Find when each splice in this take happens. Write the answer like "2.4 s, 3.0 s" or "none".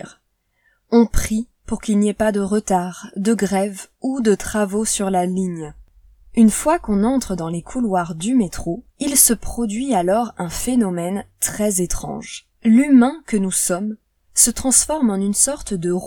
8.9 s, 12.5 s